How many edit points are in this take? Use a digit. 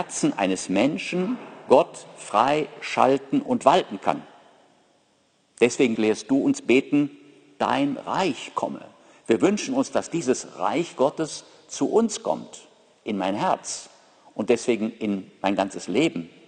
1